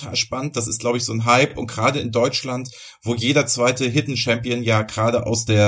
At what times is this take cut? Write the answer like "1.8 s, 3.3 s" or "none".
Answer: none